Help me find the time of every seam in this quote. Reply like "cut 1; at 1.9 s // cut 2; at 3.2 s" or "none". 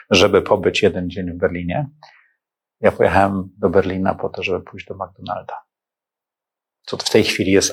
none